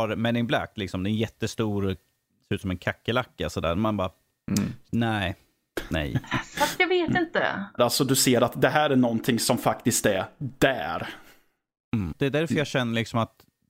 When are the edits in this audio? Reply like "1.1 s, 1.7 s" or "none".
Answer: 7.8 s, 12.1 s